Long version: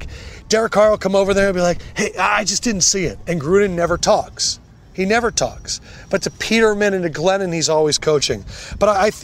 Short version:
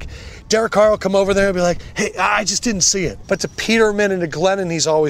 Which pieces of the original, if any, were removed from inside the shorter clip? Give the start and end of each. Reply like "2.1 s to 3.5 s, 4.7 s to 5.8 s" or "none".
3.2 s to 6.1 s